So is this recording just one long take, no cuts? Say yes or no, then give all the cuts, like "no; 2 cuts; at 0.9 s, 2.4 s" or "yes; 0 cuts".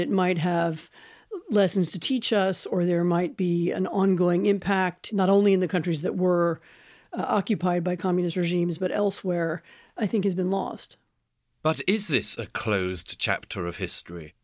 yes; 0 cuts